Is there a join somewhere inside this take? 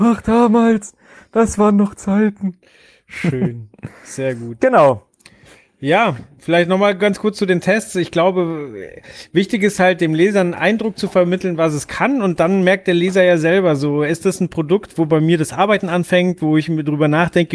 no; 0 cuts

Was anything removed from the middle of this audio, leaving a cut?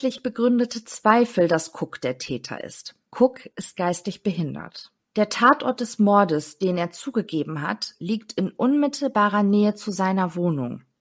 no; 0 cuts

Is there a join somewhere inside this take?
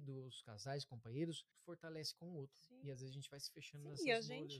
yes; 1 cut; at 1.5 s

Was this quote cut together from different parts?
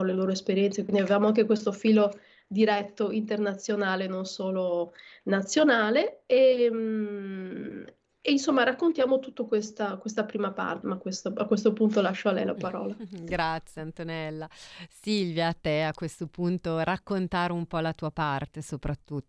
yes; 1 cut; at 10.8 s

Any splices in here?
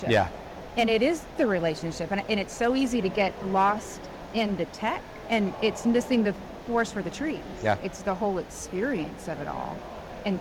yes; 2 cuts; at 5.2 s, 7.8 s

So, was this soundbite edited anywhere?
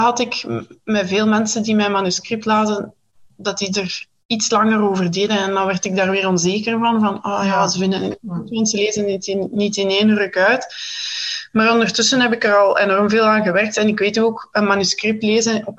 no; 0 cuts

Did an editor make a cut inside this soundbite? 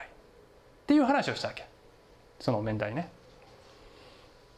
no; 0 cuts

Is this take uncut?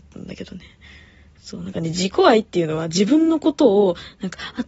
yes; 0 cuts

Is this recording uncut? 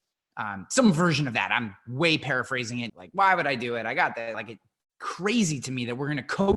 no; 2 cuts; at 2.9 s, 4.3 s

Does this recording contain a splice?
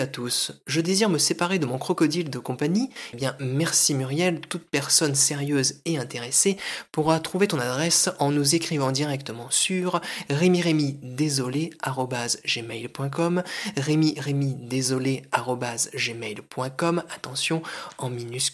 yes; 1 cut; at 3.1 s

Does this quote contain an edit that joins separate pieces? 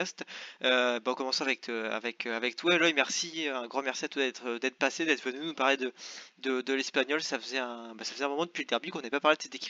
no; 0 cuts

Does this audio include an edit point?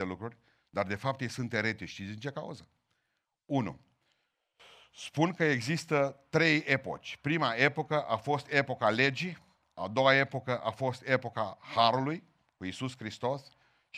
no; 0 cuts

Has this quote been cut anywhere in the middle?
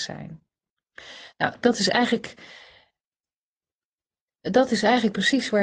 yes; 1 cut; at 1.6 s

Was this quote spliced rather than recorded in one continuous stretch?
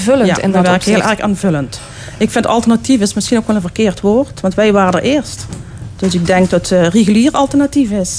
no; 0 cuts

